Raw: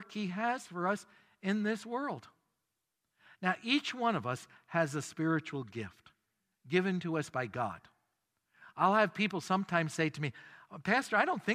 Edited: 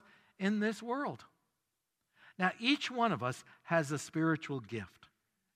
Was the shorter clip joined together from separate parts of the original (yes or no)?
no